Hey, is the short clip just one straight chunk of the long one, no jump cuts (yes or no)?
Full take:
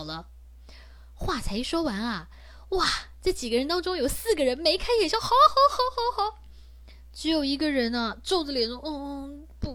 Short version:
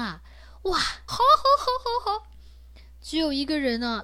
no